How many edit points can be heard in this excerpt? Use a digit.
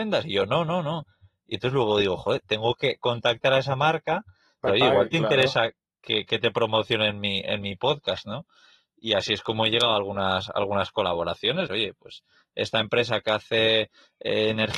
2